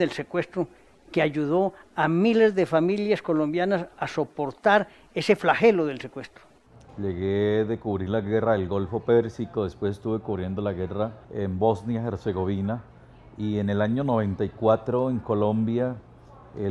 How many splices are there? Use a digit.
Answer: 2